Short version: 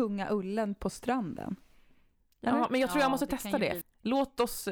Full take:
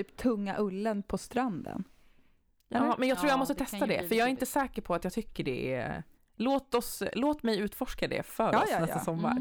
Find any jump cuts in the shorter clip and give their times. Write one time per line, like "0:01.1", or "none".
0:03.8